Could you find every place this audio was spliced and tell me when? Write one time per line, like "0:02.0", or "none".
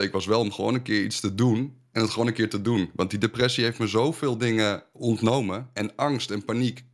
none